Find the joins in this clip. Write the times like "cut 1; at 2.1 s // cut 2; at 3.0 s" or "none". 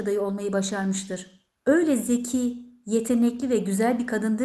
cut 1; at 1.6 s